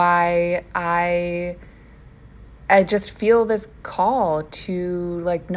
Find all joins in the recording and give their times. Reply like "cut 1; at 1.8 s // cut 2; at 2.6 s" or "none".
none

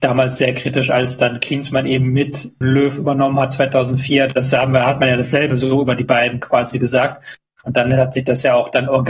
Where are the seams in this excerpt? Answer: cut 1; at 2.6 s

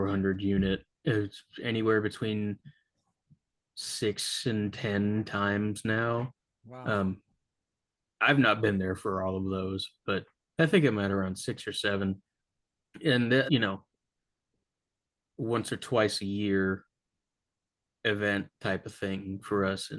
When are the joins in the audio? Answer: cut 1; at 13.5 s

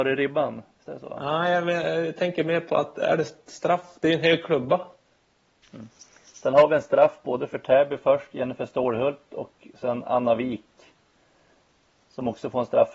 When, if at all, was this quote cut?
cut 1; at 5.6 s

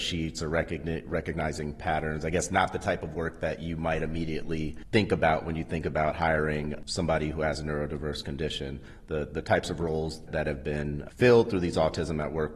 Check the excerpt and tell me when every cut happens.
cut 1; at 10.3 s

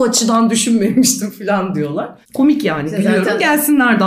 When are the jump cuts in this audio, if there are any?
cut 1; at 2.2 s

